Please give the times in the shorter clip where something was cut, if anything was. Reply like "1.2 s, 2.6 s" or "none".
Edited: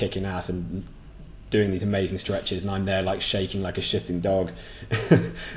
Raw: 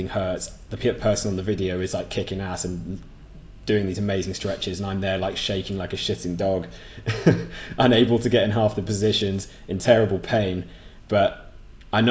none